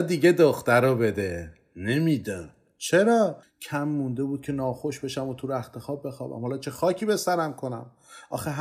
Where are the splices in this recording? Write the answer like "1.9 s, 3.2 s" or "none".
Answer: 3.4 s